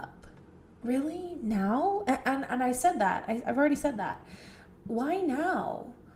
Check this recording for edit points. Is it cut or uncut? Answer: uncut